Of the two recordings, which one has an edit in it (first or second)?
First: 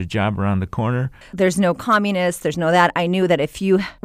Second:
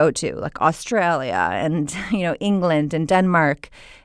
first